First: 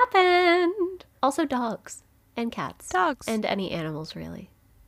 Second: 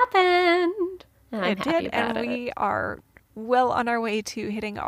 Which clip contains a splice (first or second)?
first